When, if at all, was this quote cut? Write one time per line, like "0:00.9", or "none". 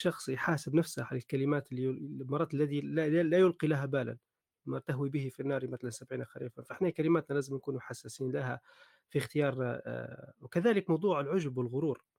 none